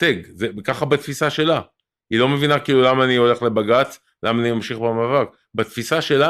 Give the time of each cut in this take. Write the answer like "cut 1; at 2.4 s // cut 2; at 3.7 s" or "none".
none